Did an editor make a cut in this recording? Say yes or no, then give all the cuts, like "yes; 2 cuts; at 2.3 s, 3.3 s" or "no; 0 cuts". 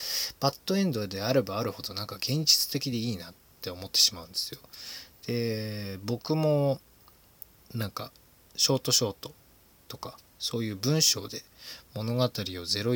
no; 0 cuts